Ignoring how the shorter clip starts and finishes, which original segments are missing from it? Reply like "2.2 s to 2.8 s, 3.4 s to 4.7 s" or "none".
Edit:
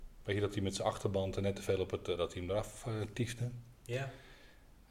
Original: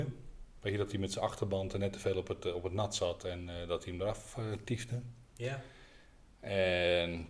2.5 s to 3.7 s